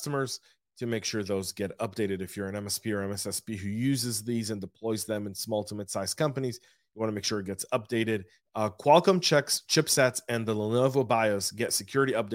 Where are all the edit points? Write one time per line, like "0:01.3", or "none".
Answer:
0:08.4